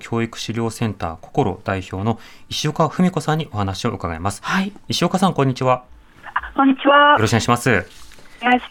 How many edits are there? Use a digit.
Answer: 0